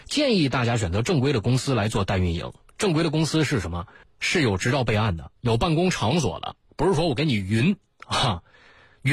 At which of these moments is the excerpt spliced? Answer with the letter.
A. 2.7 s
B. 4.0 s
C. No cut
B